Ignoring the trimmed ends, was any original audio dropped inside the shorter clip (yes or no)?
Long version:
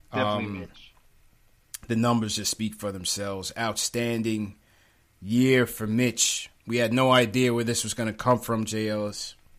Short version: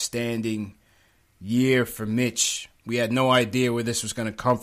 no